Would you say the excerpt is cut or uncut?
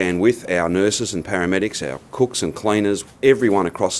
cut